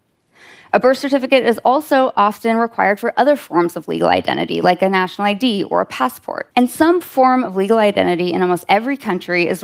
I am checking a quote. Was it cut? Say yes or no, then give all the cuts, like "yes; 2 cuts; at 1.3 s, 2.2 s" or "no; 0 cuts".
yes; 1 cut; at 6.5 s